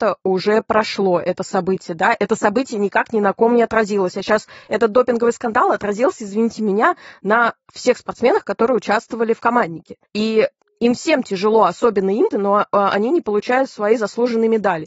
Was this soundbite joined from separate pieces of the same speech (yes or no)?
yes